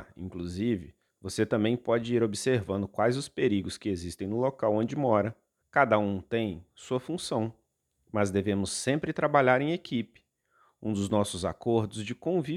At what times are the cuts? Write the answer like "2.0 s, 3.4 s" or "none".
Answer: 5.6 s

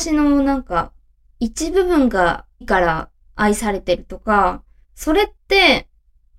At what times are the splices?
2.6 s

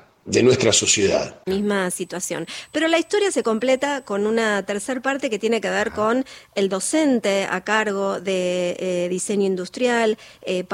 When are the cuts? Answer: 1.5 s

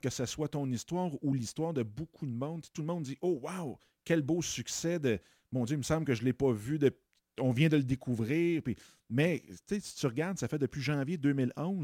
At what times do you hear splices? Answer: none

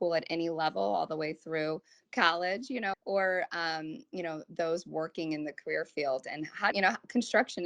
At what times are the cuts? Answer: 2.9 s, 6.7 s

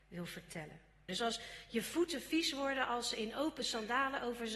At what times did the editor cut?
1.1 s

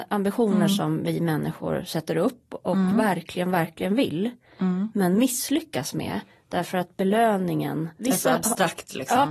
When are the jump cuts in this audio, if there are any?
none

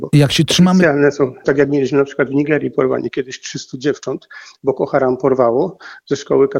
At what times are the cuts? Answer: 1.4 s

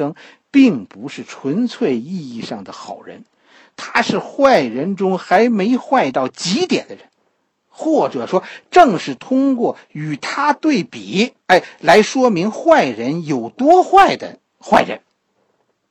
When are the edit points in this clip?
11.4 s

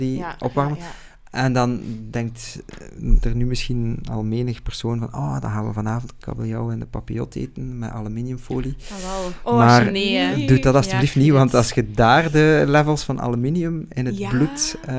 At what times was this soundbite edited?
none

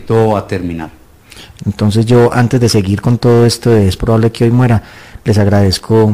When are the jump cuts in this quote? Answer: 1.6 s

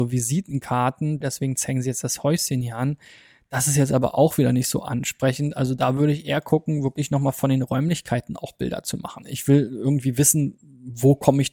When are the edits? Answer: 1.2 s, 9.2 s

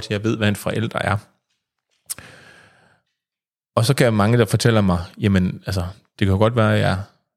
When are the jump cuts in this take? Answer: none

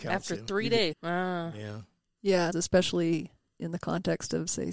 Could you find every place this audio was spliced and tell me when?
0.9 s, 2.5 s

